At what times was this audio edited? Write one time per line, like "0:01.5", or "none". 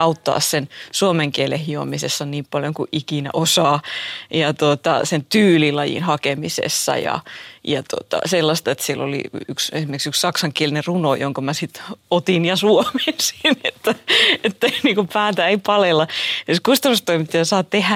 0:08.6